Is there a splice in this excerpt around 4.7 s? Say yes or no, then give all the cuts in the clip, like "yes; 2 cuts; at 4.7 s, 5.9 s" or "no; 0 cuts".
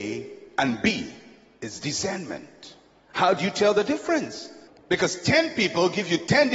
yes; 1 cut; at 4.7 s